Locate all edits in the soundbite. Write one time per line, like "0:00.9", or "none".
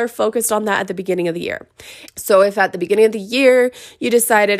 0:02.1